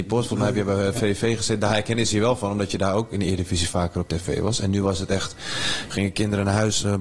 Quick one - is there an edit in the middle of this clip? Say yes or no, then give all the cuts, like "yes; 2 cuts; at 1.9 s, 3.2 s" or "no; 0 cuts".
no; 0 cuts